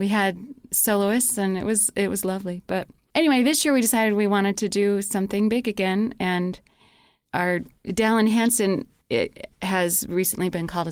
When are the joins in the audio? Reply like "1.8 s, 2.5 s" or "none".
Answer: none